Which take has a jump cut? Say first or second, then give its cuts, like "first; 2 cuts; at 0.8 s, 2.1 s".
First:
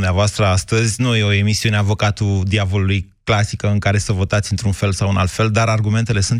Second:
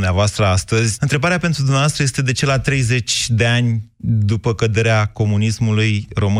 second; 1 cut; at 1.0 s